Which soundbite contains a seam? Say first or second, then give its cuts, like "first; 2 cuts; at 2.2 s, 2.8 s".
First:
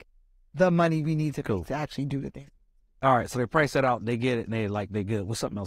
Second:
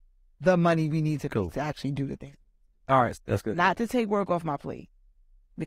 second; 1 cut; at 3.1 s